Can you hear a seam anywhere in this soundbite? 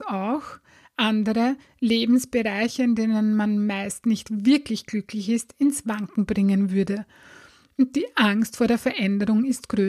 no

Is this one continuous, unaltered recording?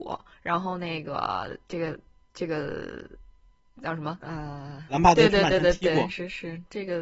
no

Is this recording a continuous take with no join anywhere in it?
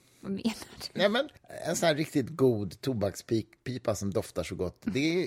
no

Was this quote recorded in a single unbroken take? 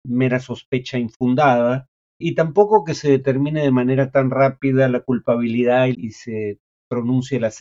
no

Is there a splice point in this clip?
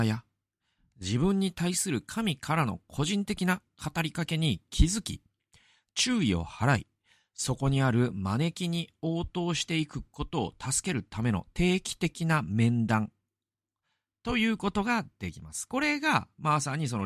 no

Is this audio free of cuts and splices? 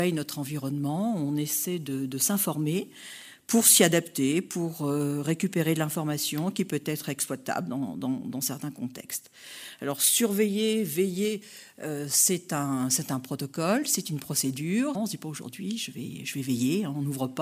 no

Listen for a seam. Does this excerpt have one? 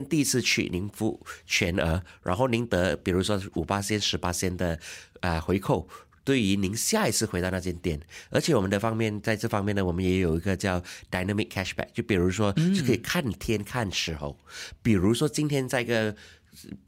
no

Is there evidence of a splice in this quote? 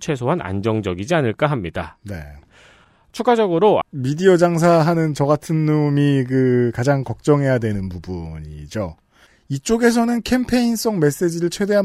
yes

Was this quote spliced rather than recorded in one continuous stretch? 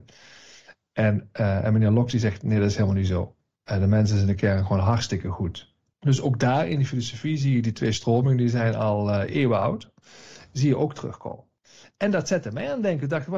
no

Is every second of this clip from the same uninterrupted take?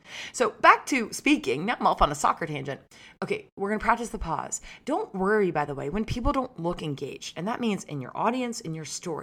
yes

